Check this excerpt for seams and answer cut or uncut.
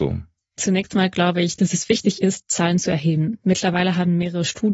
uncut